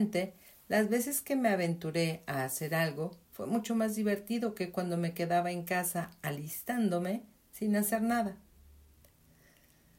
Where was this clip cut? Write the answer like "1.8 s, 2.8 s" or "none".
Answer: none